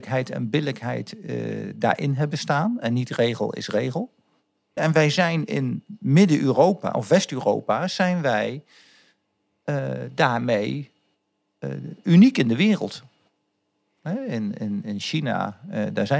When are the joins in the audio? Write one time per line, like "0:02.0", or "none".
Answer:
0:04.8